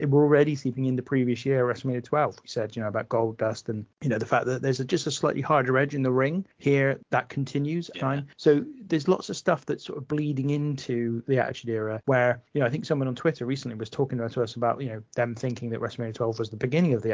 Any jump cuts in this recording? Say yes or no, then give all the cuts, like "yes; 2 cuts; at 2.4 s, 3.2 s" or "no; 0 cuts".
yes; 1 cut; at 7.9 s